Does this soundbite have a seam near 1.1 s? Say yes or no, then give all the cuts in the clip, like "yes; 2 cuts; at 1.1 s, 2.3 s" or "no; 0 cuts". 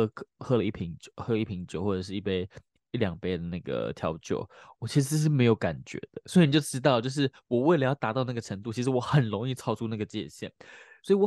no; 1 cut; at 6.3 s